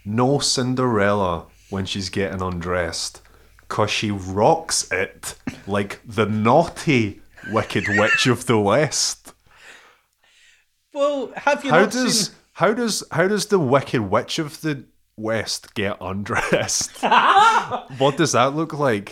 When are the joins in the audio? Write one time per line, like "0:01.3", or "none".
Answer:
0:10.2